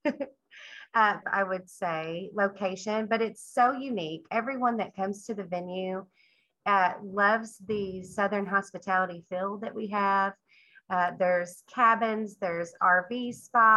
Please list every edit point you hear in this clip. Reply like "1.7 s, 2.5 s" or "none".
1.2 s